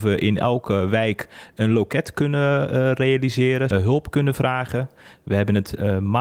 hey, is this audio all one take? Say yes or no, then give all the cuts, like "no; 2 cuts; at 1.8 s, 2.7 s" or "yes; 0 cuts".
no; 1 cut; at 3.7 s